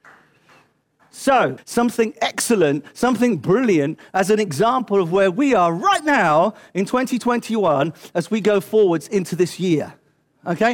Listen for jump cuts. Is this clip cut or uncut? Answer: cut